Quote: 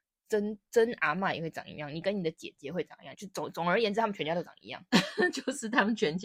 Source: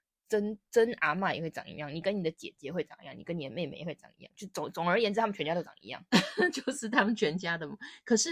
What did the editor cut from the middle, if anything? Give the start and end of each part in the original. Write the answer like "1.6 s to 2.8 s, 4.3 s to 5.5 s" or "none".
3.1 s to 4.3 s